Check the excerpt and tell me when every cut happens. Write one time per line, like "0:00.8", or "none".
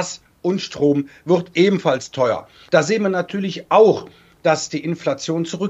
0:02.7